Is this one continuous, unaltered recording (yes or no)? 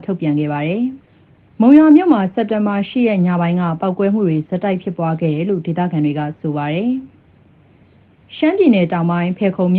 no